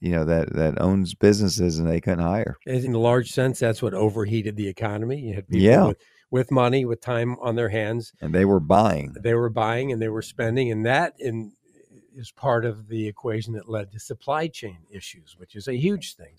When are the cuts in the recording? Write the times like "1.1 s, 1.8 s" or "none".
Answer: 2.9 s